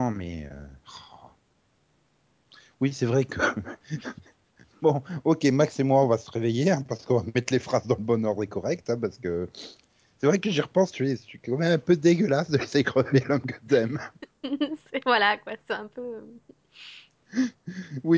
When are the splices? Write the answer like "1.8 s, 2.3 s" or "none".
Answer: none

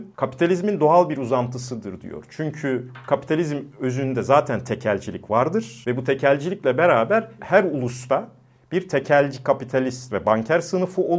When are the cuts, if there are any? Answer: 7.4 s

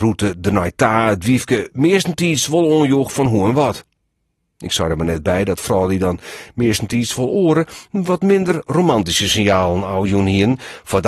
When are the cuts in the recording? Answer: none

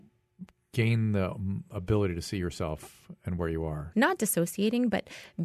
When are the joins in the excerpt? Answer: 3.9 s

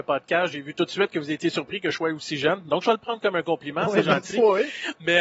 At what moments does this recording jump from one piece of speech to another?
none

